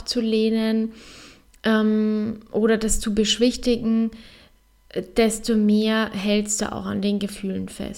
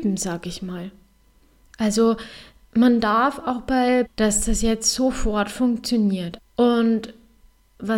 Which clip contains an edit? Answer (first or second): second